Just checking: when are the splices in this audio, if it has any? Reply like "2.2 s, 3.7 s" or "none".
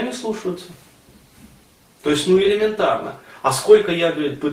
none